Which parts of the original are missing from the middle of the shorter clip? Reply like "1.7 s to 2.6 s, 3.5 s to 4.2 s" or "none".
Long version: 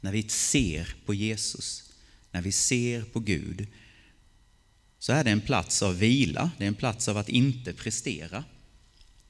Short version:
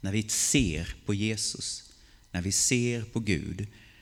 none